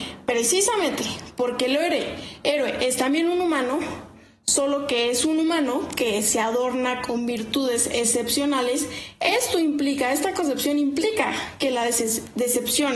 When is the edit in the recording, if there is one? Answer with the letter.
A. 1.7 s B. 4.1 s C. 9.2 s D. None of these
D